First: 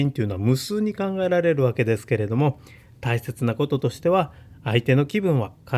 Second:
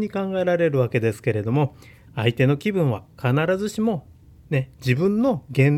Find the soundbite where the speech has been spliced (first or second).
second